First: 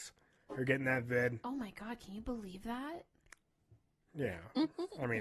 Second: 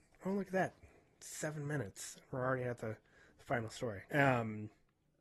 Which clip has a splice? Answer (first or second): second